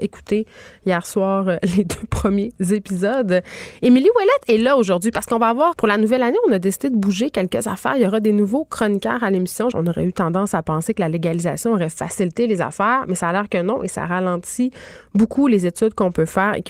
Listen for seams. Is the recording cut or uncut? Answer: cut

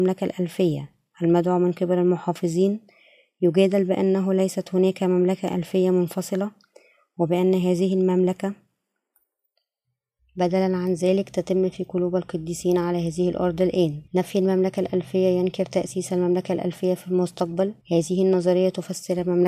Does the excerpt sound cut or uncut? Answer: cut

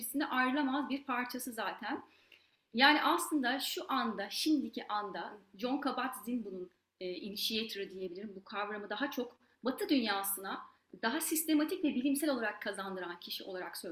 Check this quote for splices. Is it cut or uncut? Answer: uncut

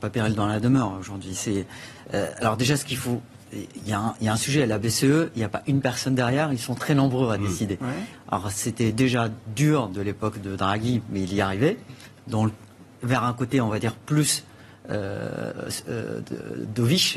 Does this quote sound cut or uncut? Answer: cut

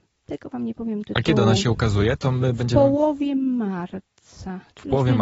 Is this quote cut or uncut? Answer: uncut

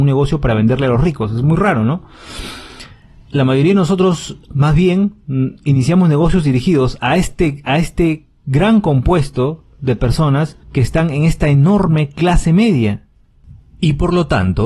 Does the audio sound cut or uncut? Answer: cut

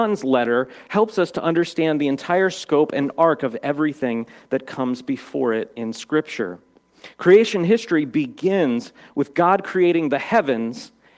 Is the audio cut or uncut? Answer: uncut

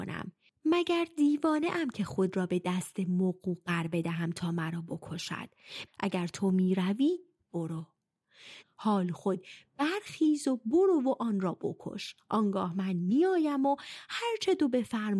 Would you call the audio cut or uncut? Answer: cut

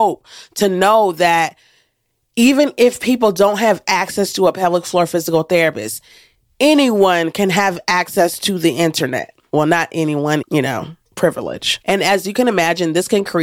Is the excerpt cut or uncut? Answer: cut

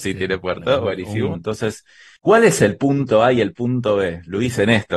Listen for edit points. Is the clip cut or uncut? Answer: cut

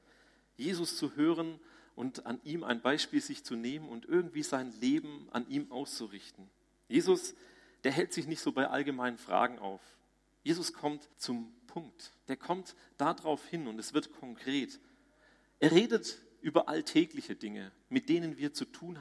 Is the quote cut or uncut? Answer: cut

